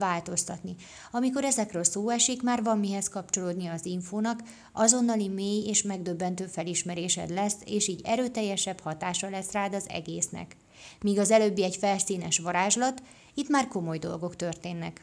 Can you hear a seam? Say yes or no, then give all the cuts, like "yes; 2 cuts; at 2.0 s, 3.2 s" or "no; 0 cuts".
no; 0 cuts